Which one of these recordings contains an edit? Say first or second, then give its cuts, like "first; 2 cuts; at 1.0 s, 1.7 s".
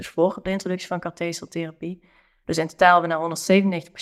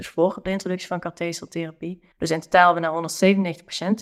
second; 1 cut; at 2.1 s